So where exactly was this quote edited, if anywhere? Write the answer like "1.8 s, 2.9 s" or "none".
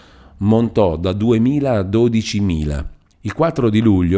3.1 s